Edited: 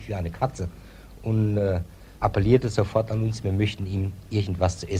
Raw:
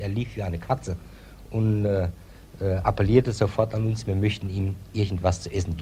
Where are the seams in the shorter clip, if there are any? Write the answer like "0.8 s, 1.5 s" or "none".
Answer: 2.2 s

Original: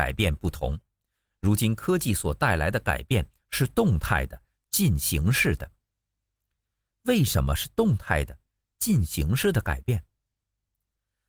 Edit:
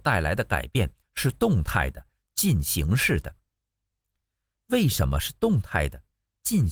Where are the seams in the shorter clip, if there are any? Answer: none

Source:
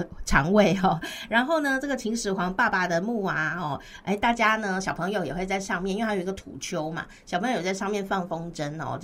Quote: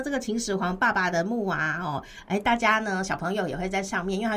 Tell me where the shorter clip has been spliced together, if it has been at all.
none

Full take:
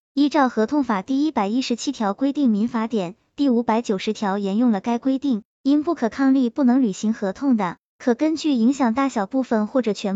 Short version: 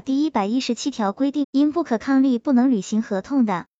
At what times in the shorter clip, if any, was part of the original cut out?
1.4 s

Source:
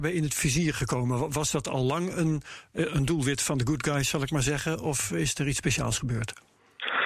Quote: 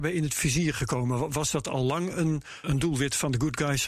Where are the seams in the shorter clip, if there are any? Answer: 2.6 s

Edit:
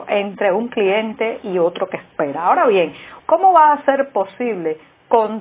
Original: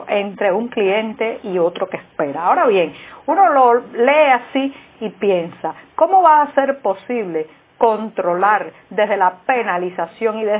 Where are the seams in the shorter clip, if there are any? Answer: 3.2 s

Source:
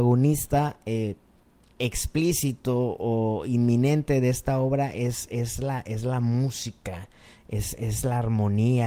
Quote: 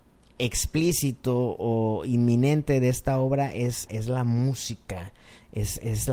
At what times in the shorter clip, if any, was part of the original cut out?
3.9 s

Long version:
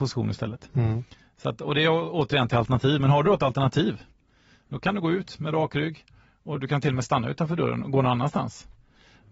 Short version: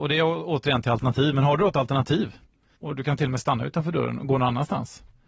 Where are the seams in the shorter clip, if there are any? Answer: 2.8 s

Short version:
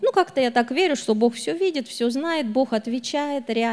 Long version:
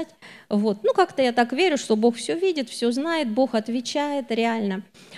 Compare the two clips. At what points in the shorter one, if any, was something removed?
none

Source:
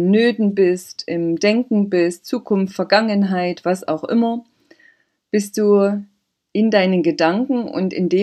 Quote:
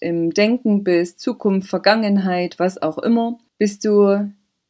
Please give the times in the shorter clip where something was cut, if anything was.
3.5 s

